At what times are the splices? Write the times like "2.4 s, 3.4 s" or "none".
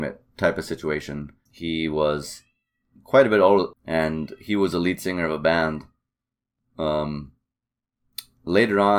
1.5 s, 3.7 s